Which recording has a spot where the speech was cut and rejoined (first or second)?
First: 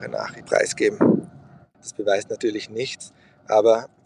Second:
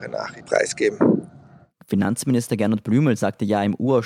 first